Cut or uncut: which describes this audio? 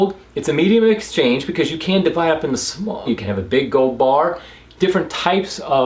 cut